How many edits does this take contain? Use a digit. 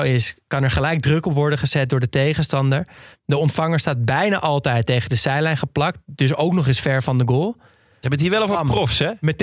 2